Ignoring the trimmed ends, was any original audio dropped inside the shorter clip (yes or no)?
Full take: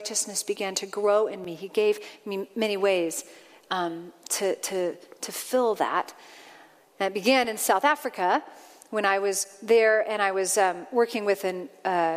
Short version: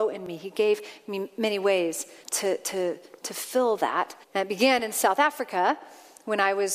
yes